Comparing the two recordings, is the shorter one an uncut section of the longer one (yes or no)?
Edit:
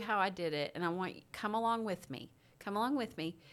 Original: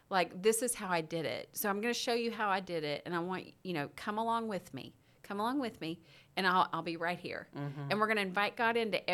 no